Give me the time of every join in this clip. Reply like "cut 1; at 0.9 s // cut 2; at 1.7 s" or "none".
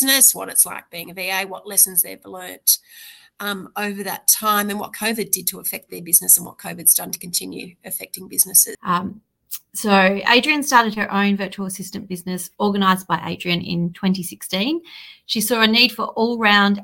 cut 1; at 8.7 s